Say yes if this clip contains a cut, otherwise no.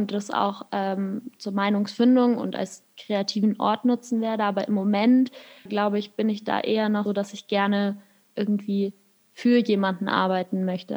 yes